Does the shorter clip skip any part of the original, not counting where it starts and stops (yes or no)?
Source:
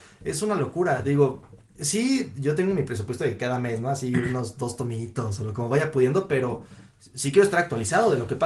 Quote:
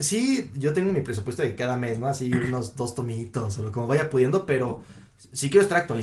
no